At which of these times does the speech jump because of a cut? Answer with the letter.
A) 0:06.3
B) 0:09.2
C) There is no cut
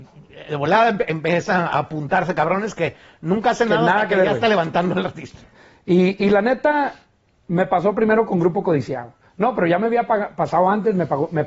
C